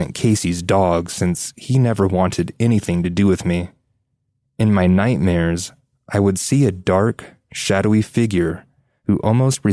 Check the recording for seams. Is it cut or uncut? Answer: uncut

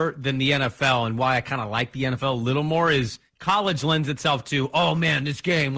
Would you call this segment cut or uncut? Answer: cut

